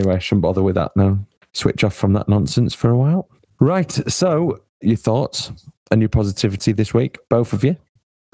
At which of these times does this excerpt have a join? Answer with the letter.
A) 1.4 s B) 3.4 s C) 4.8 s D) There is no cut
C